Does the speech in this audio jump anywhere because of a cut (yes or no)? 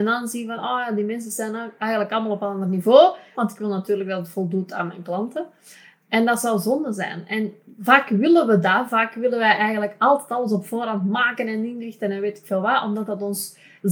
yes